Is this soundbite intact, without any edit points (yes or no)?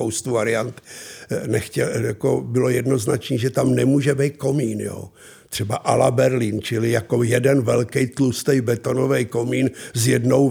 yes